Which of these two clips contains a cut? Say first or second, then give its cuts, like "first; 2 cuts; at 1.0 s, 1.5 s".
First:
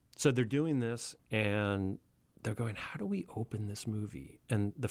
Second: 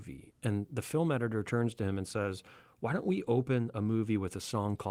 first; 1 cut; at 1.2 s